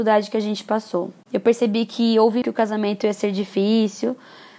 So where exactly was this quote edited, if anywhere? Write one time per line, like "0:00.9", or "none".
0:02.4